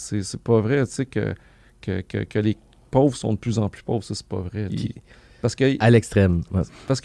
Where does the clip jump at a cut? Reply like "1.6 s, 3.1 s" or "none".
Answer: 4.7 s